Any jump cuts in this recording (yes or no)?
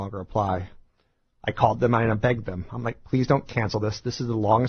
no